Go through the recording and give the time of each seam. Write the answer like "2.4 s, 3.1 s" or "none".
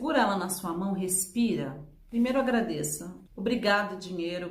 3.3 s